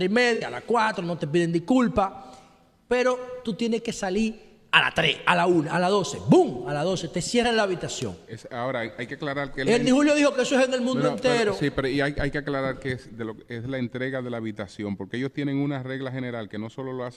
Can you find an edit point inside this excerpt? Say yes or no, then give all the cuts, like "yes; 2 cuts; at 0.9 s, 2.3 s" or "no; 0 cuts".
no; 0 cuts